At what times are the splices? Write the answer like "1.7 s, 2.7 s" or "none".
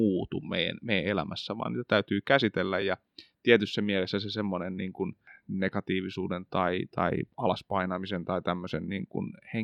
none